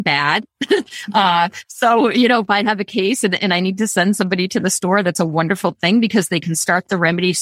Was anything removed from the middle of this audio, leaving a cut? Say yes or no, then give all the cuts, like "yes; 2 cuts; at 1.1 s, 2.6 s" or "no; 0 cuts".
no; 0 cuts